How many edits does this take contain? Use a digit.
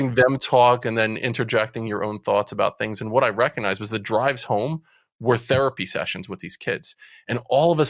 0